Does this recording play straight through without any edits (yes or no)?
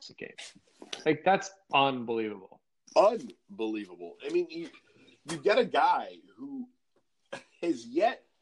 yes